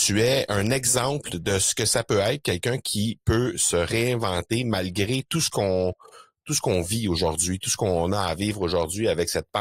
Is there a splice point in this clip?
no; 0 cuts

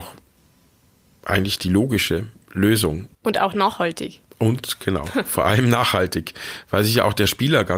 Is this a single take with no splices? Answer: no; 1 cut; at 3.1 s

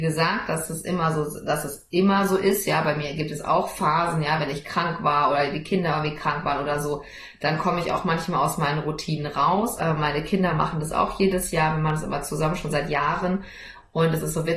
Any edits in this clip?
yes; 1 cut; at 9.8 s

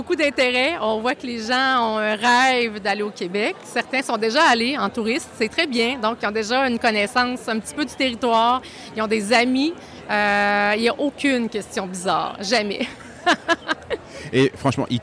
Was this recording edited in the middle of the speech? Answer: no; 0 cuts

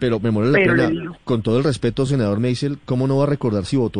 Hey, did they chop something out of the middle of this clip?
no; 0 cuts

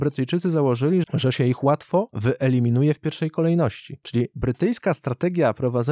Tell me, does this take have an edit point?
yes; 1 cut; at 1.0 s

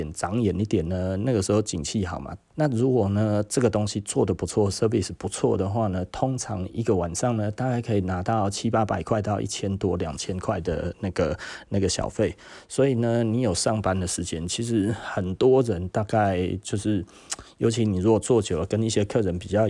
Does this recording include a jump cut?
yes; 1 cut; at 2.5 s

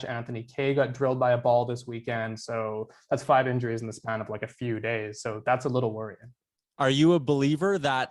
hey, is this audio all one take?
yes; 0 cuts

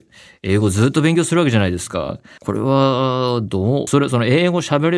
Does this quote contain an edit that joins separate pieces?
yes; 2 cuts; at 2.4 s, 3.9 s

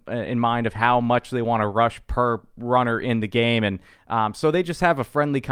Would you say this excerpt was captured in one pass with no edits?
yes; 0 cuts

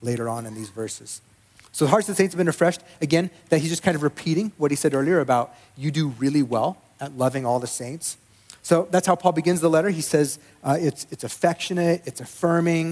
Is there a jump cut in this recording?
no; 0 cuts

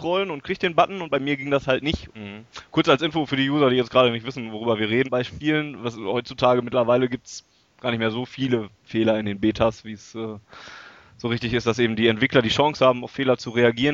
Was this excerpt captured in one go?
no; 2 cuts; at 2.1 s, 5.0 s

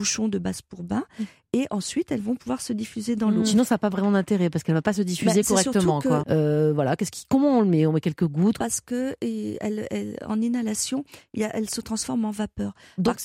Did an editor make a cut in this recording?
yes; 2 cuts; at 6.2 s, 8.6 s

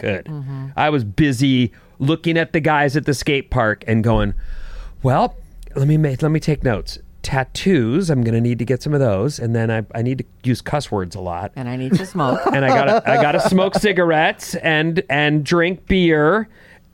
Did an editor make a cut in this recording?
no; 0 cuts

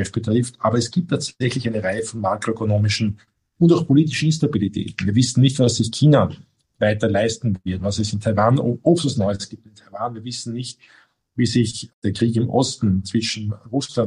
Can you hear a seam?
no; 0 cuts

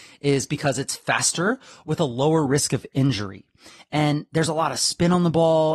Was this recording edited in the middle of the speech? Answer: no; 0 cuts

